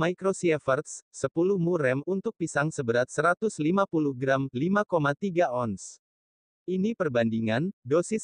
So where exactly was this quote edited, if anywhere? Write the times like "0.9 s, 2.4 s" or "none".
none